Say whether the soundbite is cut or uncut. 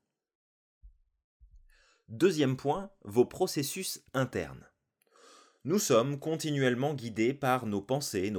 uncut